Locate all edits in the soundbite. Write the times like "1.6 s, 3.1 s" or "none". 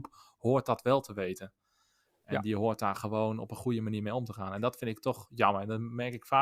none